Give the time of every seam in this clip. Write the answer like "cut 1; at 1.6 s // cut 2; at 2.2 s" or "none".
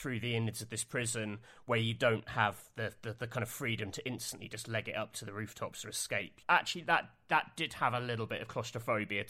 cut 1; at 6.4 s